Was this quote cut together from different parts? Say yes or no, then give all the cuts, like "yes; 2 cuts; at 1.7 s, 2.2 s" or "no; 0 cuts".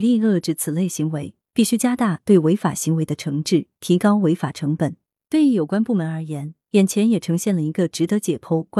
no; 0 cuts